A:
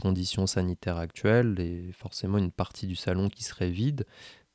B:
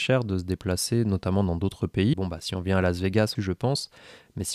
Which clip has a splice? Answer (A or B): B